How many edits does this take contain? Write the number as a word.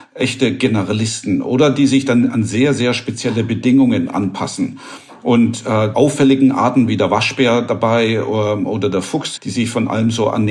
two